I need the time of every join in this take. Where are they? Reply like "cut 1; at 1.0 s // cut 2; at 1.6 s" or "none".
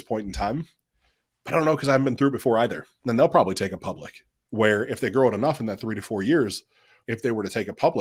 cut 1; at 3.0 s // cut 2; at 7.0 s

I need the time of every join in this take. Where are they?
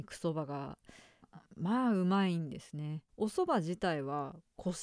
cut 1; at 3.1 s

